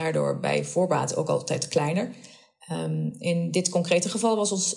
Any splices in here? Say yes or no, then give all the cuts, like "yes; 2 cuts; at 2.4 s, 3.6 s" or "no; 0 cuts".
no; 0 cuts